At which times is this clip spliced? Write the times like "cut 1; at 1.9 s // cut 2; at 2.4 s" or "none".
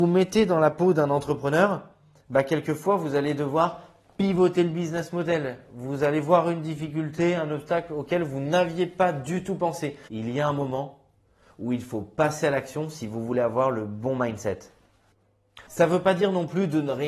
cut 1; at 10.1 s // cut 2; at 15.7 s